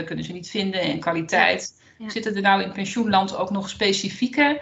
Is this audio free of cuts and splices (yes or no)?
yes